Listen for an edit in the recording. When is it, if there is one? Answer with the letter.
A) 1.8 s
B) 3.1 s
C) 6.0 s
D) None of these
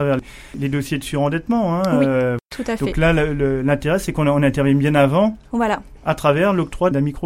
C